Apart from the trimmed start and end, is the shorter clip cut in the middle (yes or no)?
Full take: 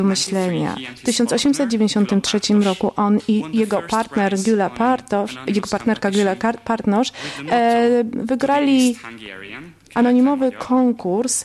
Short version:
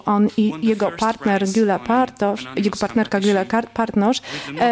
no